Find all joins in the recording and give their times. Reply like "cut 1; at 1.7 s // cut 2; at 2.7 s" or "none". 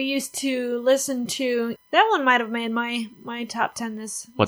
cut 1; at 1.8 s